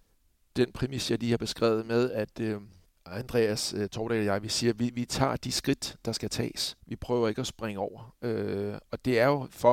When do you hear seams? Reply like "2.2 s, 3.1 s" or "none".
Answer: none